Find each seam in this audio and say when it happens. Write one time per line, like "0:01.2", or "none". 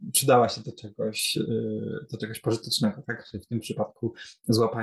none